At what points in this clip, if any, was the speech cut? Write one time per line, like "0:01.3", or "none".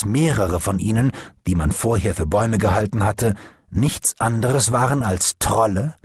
none